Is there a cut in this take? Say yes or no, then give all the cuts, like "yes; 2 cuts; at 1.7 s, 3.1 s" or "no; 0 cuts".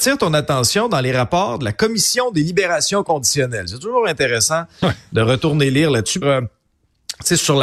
yes; 1 cut; at 6.2 s